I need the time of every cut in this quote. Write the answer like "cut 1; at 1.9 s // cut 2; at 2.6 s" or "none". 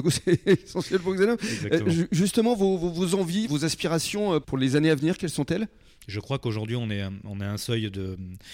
none